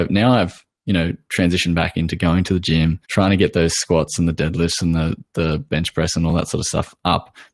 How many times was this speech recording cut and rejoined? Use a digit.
1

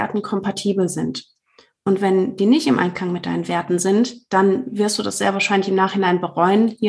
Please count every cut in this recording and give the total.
0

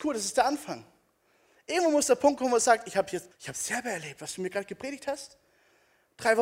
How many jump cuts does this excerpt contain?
1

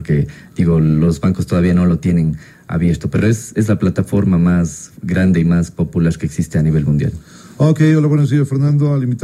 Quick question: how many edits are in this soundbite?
0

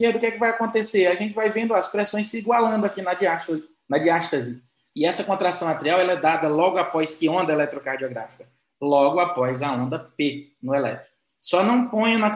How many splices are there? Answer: 2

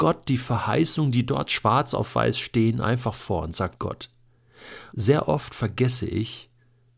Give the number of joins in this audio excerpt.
2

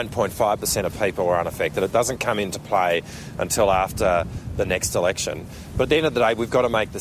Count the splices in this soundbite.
0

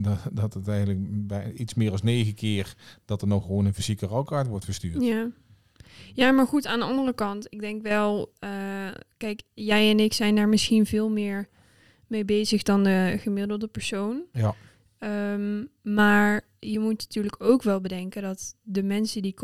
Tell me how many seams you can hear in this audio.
0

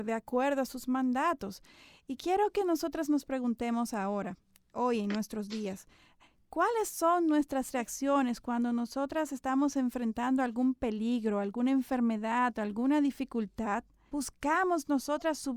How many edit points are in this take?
1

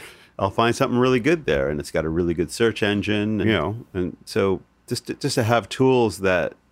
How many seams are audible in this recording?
1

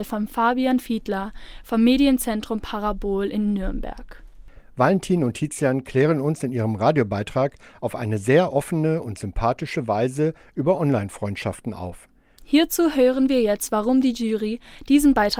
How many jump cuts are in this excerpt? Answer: 1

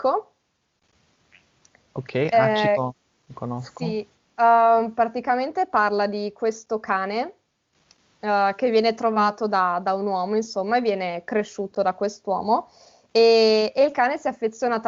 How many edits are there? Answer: 0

